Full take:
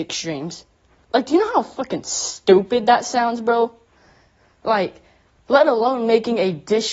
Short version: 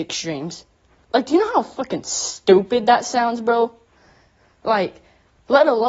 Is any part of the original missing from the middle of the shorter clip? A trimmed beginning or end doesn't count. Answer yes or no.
no